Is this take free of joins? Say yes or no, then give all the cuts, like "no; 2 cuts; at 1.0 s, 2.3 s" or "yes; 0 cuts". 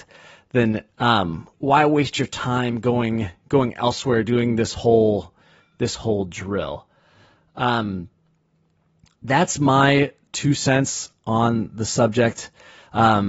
no; 1 cut; at 1.5 s